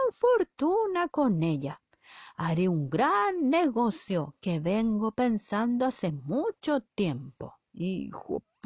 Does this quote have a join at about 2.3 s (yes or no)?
no